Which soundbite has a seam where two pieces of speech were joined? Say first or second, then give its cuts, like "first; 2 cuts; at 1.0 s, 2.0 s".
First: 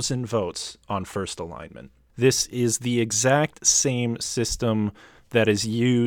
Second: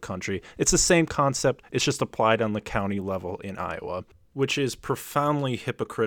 first; 1 cut; at 2.1 s